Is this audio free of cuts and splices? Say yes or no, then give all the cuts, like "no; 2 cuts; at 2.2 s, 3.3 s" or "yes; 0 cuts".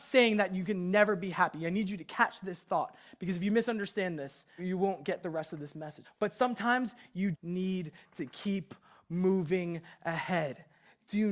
no; 3 cuts; at 4.6 s, 6.0 s, 7.3 s